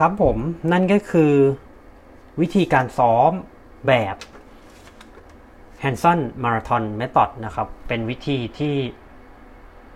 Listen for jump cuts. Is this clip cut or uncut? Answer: uncut